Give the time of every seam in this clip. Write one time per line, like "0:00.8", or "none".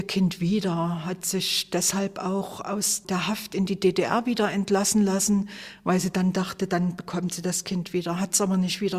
none